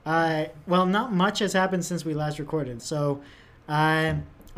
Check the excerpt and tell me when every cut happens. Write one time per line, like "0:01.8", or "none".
0:02.8